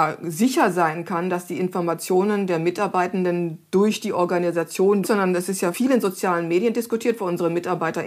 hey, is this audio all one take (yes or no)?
no